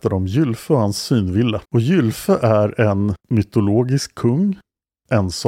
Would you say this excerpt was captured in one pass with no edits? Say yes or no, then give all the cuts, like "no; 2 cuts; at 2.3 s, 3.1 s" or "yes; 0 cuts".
no; 2 cuts; at 1.6 s, 3.2 s